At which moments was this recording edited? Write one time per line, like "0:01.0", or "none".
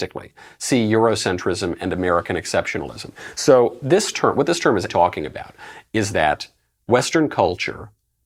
0:04.9